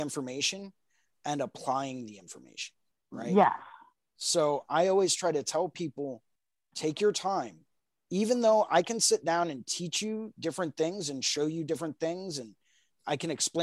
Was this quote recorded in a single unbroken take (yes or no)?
yes